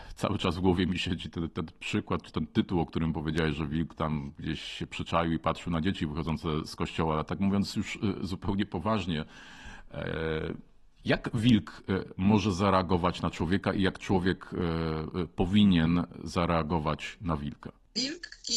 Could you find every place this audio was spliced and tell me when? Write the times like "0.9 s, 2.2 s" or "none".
none